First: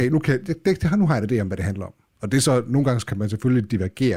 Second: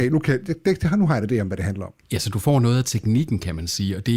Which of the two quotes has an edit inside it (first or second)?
second